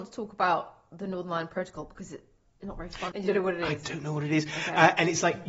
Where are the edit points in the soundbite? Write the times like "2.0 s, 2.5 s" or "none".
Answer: 3.1 s